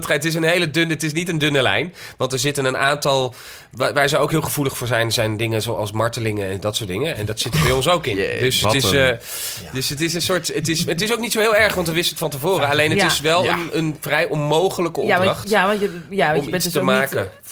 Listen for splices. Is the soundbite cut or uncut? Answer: uncut